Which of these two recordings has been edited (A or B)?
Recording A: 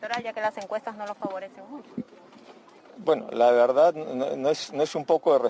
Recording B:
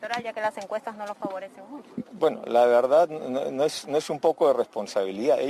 B